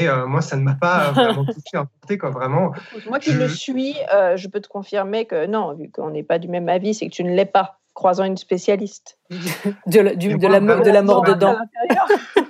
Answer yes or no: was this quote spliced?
no